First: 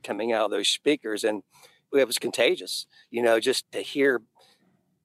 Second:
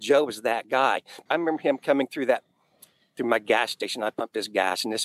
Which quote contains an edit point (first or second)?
first